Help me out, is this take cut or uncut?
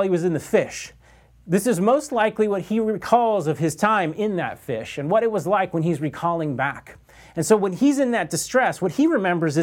uncut